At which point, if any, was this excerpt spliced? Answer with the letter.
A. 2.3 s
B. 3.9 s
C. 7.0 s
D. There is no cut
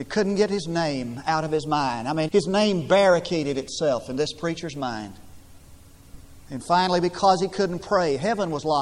A